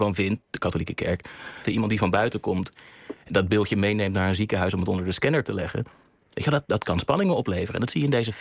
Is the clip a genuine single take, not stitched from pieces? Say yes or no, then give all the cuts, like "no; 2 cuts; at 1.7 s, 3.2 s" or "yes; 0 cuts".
no; 2 cuts; at 1.6 s, 6.7 s